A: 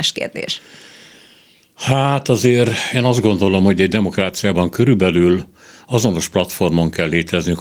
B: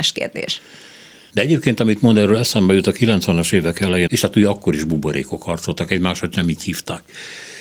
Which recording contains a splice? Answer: B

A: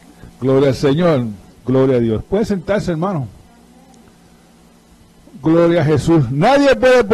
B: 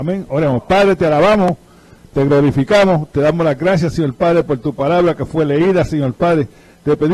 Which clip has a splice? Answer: A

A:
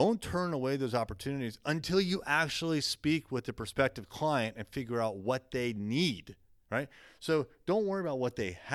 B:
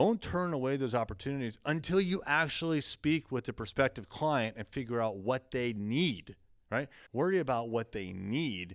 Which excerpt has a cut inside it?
B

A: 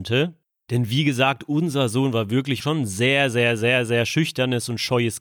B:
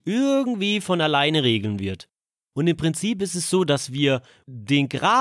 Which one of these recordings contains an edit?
A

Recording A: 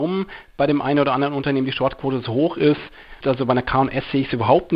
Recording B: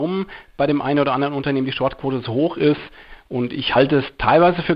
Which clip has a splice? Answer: A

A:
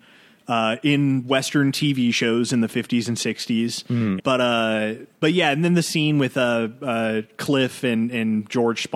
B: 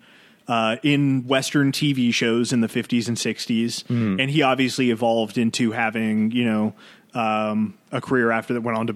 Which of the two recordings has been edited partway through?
A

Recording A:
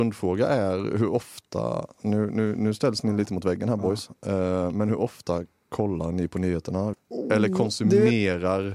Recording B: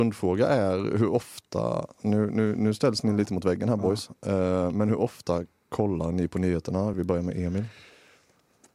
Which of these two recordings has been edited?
A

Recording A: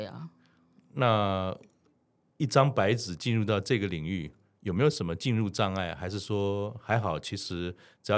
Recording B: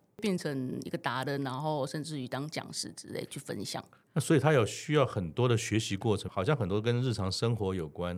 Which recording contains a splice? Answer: B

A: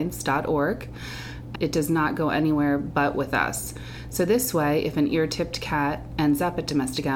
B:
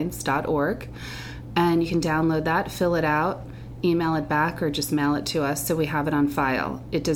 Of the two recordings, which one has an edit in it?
A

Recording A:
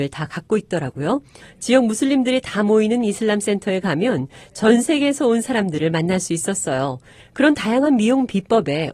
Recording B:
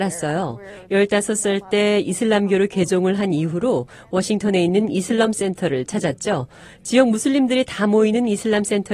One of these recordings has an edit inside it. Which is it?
A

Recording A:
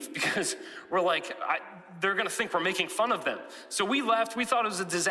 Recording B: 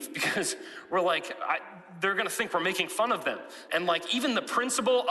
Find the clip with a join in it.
B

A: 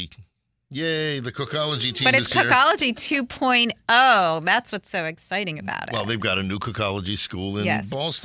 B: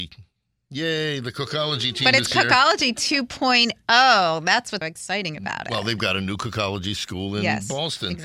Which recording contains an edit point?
B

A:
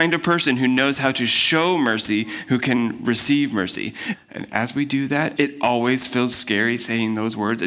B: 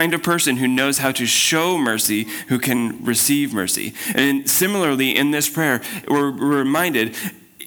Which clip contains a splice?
A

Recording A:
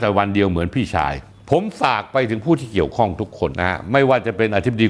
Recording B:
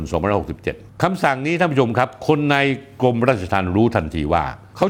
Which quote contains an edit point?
A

